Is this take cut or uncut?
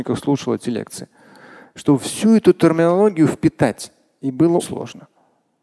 cut